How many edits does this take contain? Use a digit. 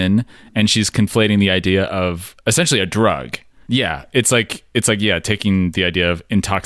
1